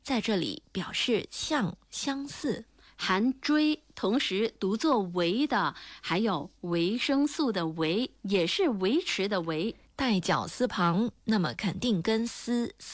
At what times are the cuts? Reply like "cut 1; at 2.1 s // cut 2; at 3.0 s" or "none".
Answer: none